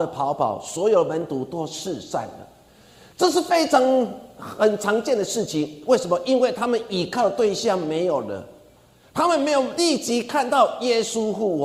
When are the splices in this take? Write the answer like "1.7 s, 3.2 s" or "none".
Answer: none